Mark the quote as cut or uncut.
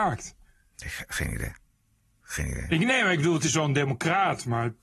uncut